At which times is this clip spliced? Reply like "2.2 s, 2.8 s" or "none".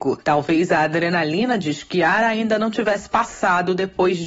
none